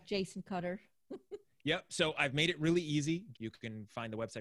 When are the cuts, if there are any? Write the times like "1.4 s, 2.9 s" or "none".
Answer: 3.3 s